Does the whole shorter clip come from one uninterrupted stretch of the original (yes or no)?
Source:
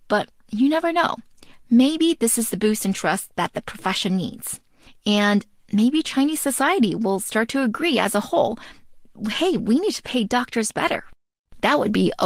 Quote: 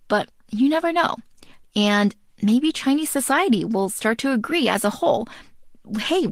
no